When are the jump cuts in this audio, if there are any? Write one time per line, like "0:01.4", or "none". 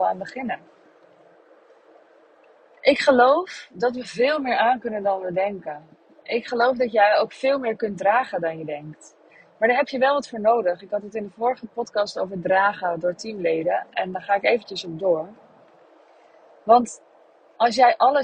none